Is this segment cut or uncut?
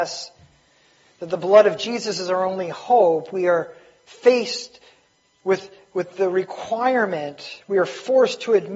uncut